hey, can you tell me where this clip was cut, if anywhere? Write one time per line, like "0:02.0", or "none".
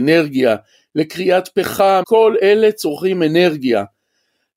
0:02.0